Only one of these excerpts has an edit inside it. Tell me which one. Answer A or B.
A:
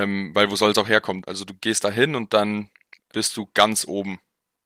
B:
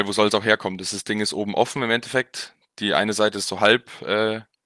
A